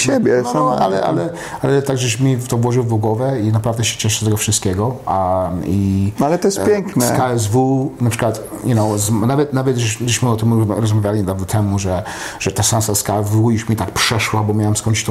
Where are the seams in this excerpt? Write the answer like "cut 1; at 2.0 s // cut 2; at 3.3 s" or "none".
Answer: none

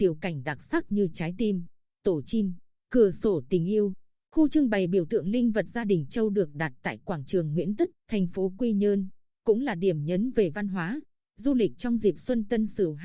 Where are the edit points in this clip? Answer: cut 1; at 4.2 s // cut 2; at 7.9 s

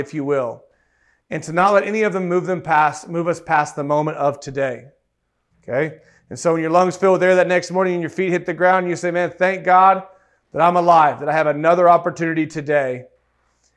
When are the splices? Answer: cut 1; at 5.5 s

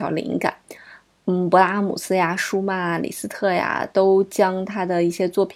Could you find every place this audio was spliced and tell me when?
none

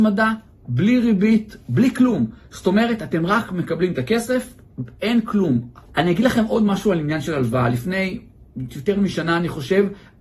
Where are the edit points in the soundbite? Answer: cut 1; at 5.9 s

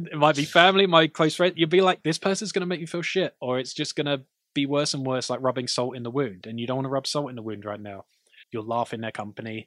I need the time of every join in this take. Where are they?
cut 1; at 8.4 s

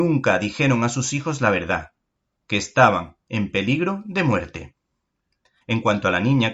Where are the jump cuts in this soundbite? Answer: cut 1; at 5.6 s

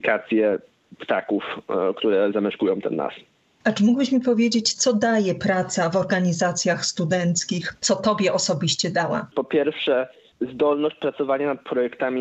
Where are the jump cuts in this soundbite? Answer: cut 1; at 9.3 s

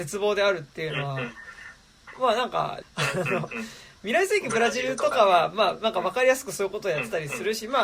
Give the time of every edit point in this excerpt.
cut 1; at 2.8 s

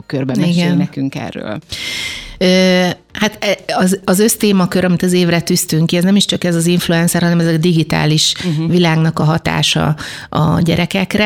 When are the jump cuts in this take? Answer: none

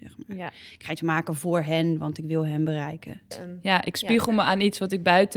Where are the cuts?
cut 1; at 3.3 s

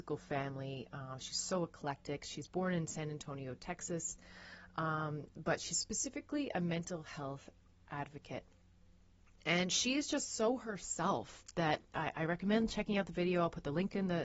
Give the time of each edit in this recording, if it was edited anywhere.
none

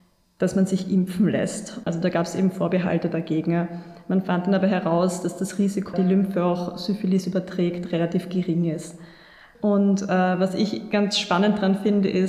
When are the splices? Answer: cut 1; at 1.9 s // cut 2; at 5.9 s

